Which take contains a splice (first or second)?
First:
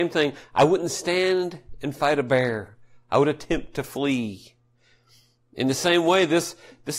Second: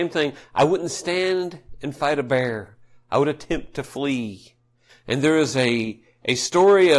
second